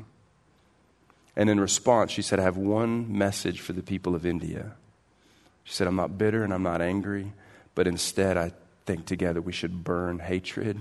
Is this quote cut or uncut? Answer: uncut